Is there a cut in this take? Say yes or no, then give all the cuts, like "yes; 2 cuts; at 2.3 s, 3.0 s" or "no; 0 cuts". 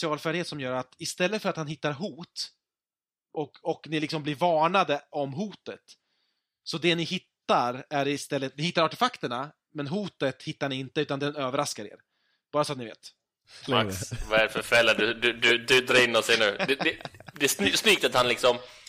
yes; 1 cut; at 13.7 s